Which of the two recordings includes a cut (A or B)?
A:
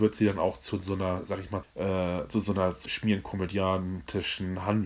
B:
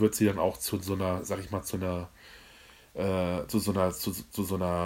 A